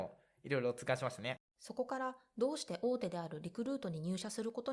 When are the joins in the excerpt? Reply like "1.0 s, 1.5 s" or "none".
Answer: 1.5 s